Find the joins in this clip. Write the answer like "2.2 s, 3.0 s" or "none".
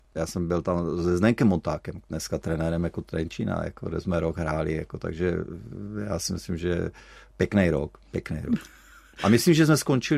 none